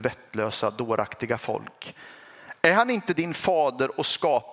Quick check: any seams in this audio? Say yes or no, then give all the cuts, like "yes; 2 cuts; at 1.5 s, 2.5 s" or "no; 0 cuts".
no; 0 cuts